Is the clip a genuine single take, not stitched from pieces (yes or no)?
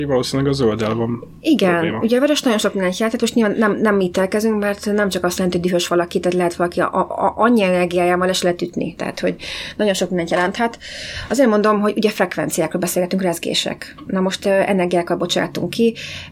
yes